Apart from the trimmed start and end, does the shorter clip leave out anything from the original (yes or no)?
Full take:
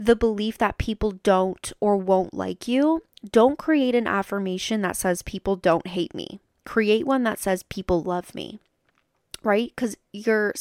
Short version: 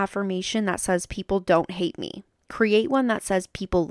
no